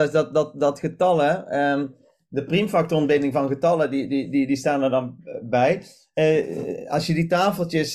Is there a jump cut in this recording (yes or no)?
no